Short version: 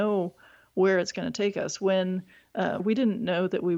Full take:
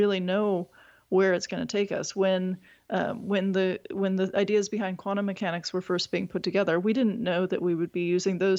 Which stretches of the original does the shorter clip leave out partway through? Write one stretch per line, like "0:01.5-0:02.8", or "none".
0:03.1-0:06.8